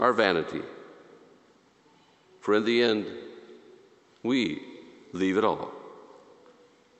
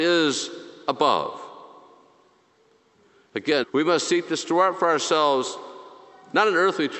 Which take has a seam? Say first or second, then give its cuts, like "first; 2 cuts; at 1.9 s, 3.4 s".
second; 1 cut; at 3.6 s